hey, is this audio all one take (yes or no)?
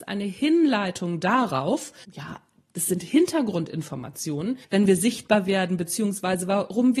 no